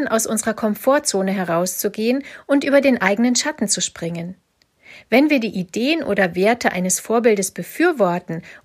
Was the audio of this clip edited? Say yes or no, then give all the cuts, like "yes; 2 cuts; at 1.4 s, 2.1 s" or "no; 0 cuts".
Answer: no; 0 cuts